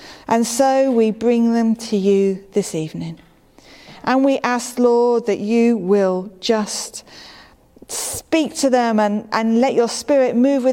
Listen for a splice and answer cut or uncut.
uncut